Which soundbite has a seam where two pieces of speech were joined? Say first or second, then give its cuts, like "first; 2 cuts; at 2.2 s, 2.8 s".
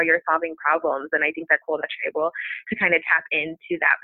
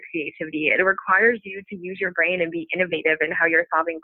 first; 1 cut; at 1.6 s